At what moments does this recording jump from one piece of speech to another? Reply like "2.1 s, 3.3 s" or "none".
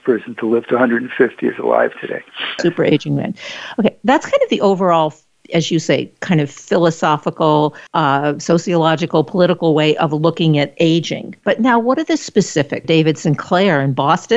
2.6 s, 7.9 s, 12.8 s